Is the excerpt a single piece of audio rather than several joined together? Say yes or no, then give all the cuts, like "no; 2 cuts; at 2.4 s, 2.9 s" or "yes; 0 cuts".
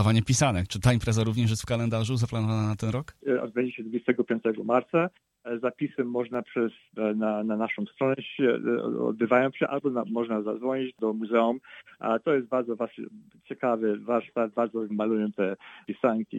no; 1 cut; at 14.9 s